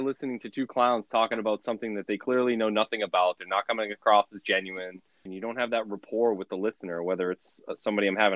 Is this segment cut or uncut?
cut